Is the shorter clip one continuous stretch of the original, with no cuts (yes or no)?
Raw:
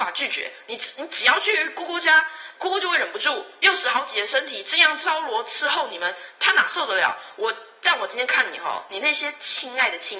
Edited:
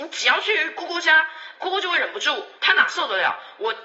no